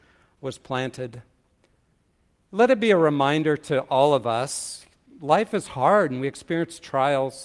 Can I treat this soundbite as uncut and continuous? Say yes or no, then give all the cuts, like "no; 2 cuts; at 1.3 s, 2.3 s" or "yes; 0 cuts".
yes; 0 cuts